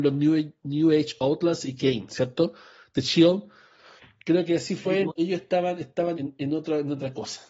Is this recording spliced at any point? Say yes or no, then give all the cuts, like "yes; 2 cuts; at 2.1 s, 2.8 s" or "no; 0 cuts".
yes; 2 cuts; at 5.1 s, 6.1 s